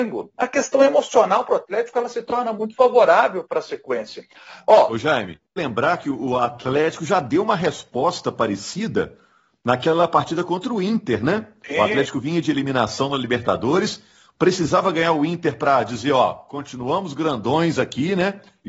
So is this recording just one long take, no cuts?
no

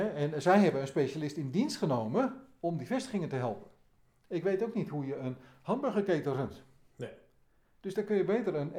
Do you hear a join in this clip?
no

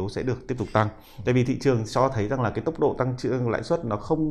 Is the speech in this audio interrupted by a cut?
no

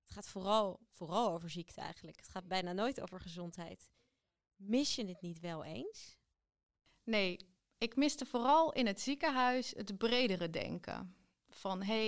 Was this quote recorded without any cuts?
yes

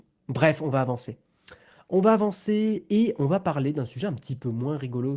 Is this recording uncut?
yes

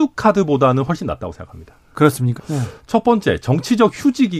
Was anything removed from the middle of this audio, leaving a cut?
yes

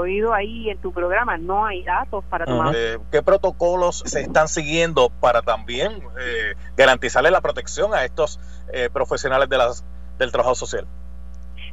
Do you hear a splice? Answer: yes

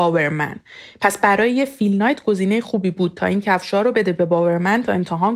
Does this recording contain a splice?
yes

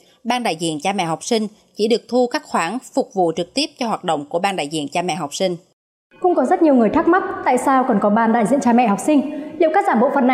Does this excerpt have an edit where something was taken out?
no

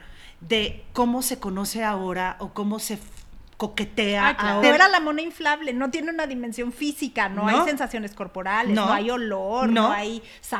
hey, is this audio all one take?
no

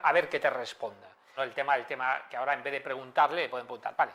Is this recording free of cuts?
no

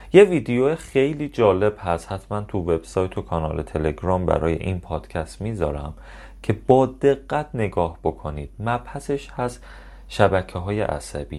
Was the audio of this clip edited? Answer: no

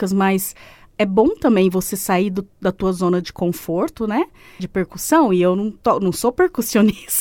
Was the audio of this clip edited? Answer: yes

